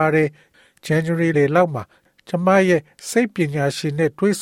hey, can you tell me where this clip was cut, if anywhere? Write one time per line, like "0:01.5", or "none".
0:01.3